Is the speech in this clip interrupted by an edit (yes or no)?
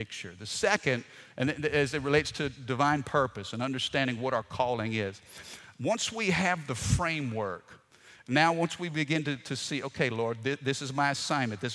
no